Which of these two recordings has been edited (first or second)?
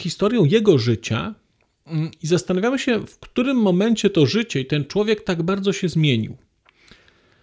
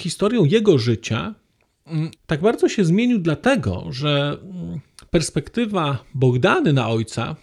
second